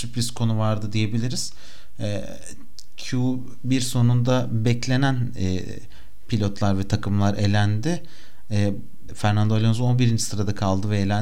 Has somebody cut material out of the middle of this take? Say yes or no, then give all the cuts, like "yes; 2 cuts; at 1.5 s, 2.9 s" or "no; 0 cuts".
yes; 1 cut; at 9.1 s